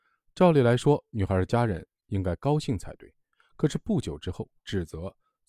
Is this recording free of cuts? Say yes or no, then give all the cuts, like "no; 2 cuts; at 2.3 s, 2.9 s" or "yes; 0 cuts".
no; 1 cut; at 4.6 s